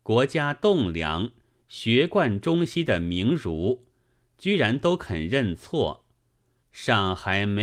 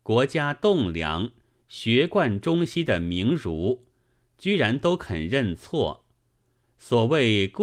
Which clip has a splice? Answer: first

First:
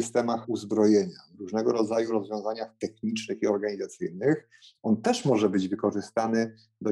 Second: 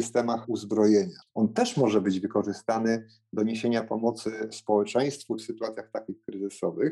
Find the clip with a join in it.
second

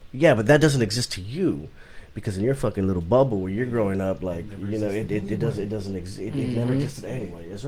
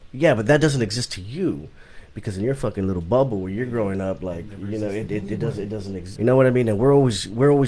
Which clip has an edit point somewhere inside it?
second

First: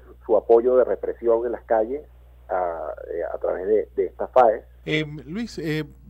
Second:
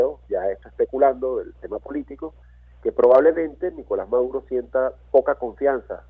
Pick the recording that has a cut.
first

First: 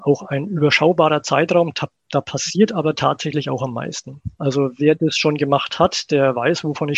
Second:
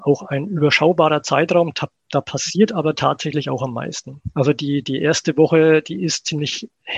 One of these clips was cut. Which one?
second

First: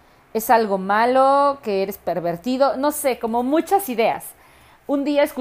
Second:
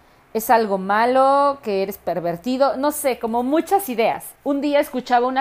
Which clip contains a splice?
second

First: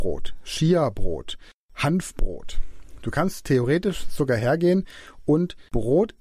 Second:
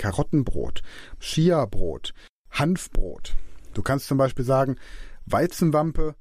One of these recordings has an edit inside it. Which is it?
second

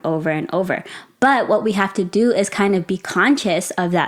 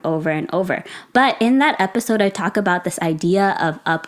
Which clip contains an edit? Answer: second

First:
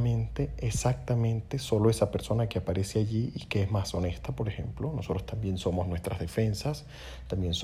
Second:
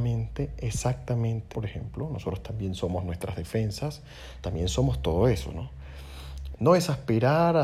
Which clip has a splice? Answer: second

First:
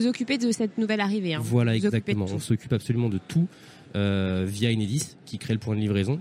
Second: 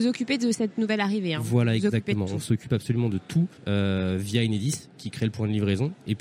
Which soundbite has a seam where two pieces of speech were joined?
second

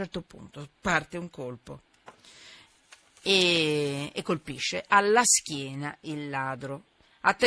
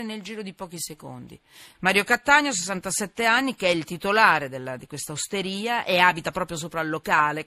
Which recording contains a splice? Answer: second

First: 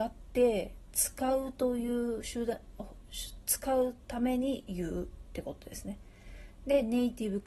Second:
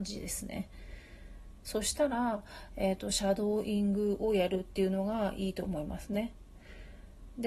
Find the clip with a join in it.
second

